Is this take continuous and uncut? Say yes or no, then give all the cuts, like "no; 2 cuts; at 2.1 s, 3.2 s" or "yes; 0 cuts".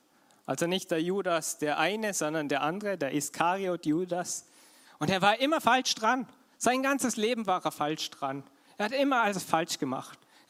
no; 1 cut; at 4.9 s